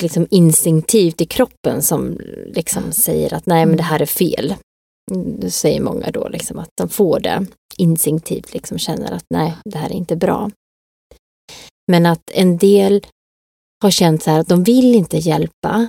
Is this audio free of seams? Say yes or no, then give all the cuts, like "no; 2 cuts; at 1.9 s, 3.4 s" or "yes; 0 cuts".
yes; 0 cuts